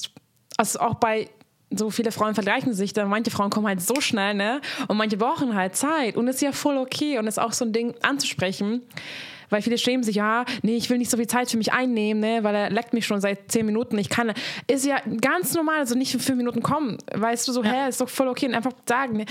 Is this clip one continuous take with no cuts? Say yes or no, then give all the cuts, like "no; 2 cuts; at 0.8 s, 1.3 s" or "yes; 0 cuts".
yes; 0 cuts